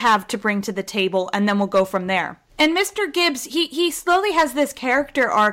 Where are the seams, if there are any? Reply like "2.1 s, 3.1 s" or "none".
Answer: 2.5 s

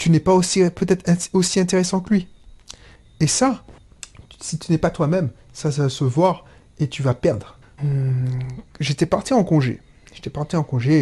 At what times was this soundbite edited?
7.8 s

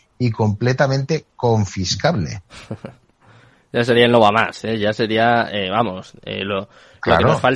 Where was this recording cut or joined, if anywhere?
none

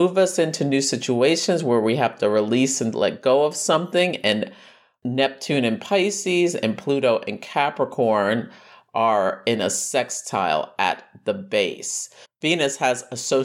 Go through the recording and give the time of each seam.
12.2 s

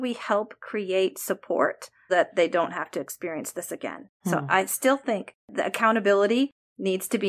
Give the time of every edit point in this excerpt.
2.1 s, 4.2 s

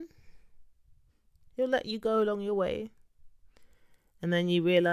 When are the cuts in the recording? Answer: none

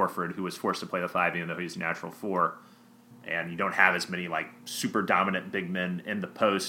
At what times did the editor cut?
3.1 s

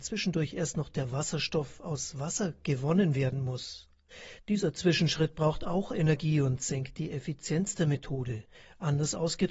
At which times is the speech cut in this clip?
none

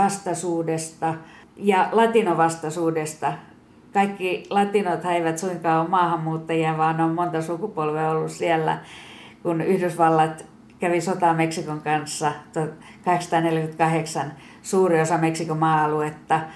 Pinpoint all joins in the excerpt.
none

